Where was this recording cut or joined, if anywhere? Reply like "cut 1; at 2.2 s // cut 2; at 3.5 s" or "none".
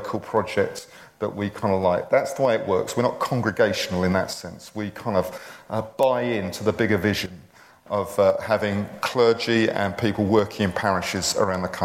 none